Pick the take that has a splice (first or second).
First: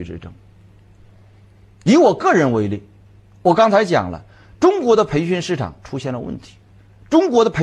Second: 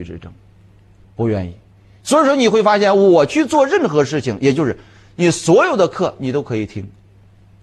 second